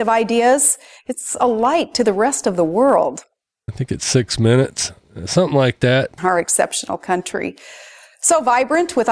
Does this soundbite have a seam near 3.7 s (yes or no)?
yes